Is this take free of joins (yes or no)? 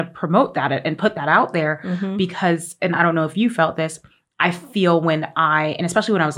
yes